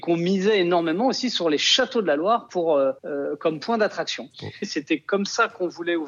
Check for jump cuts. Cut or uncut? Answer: cut